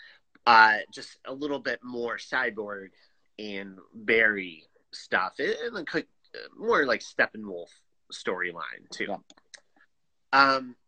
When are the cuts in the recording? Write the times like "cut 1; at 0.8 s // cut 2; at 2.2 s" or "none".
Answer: none